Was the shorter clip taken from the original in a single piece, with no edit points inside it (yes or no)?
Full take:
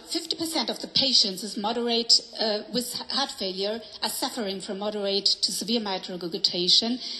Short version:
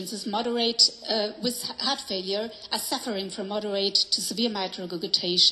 yes